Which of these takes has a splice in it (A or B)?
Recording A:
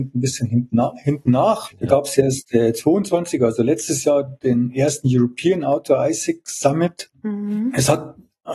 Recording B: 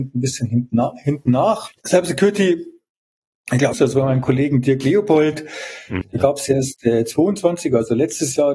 B